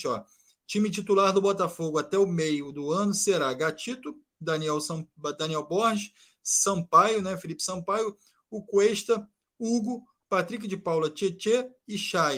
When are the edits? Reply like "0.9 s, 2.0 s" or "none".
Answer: none